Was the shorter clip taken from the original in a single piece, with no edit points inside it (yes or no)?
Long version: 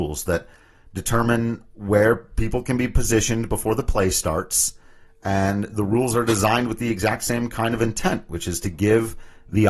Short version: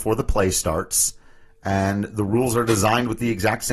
yes